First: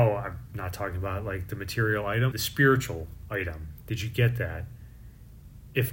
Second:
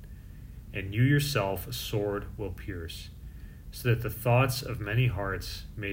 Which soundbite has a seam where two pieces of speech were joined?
first; 1 cut; at 2.3 s

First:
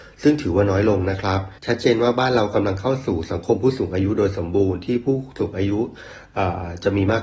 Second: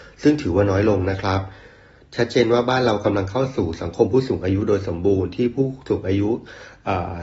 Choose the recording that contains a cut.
first; 1 cut; at 1.6 s

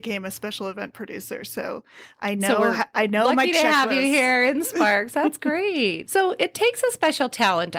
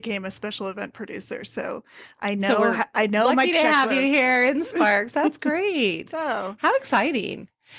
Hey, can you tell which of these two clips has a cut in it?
first; 1 cut; at 6.0 s

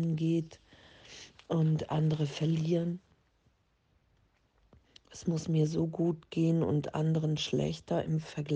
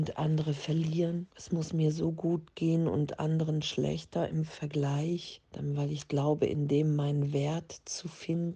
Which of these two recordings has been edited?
second; 2 cuts; at 1.3 s, 5.4 s

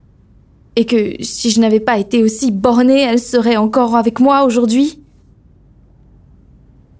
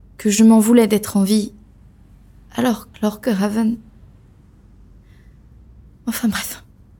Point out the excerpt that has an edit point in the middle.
second; 1 cut; at 2.9 s

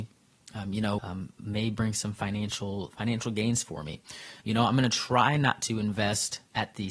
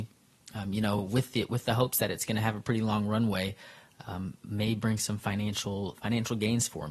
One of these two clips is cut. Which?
first; 2 cuts; at 1.0 s, 4.4 s

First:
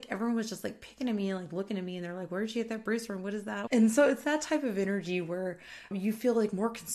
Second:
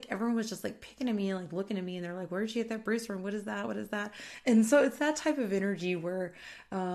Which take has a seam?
first; 2 cuts; at 3.7 s, 5.9 s

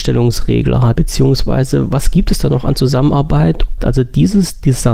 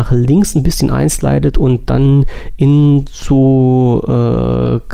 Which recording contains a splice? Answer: first; 2 cuts; at 0.9 s, 3.8 s

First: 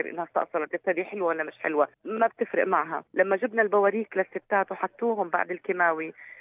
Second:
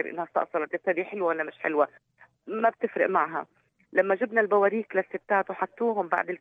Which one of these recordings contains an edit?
first; 2 cuts; at 1.9 s, 3.1 s

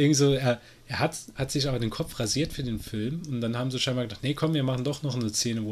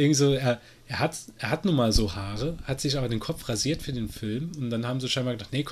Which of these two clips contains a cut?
first; 1 cut; at 1.3 s

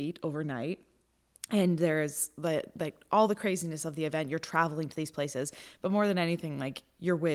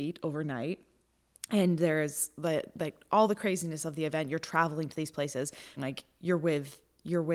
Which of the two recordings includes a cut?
second; 1 cut; at 5.8 s

